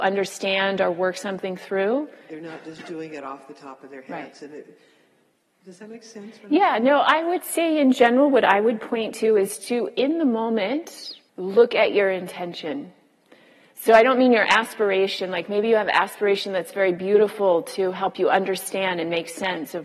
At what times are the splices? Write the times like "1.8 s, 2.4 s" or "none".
2.3 s, 11.3 s